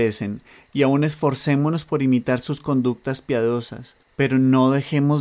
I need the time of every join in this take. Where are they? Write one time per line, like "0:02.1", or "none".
0:04.0